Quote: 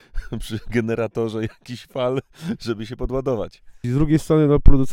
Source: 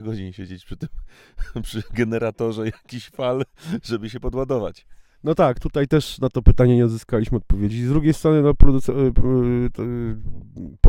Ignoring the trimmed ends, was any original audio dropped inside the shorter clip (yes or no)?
yes